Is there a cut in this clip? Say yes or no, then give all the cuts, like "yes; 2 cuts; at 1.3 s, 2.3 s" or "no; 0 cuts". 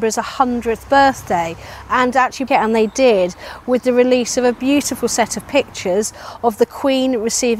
yes; 1 cut; at 2.5 s